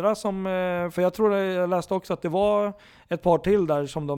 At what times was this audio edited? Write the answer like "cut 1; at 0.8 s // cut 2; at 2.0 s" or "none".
none